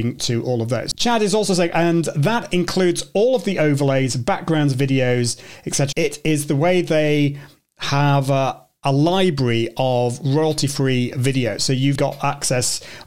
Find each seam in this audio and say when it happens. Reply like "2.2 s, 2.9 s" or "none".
5.9 s, 11.9 s

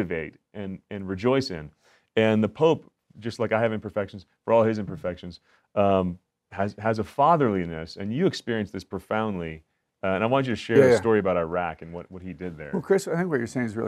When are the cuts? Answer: none

